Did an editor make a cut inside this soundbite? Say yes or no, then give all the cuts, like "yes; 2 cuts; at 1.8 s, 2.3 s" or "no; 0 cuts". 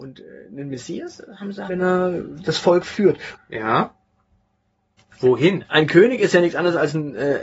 yes; 2 cuts; at 1.7 s, 3.3 s